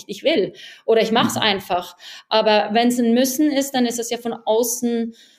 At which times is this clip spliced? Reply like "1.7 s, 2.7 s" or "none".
none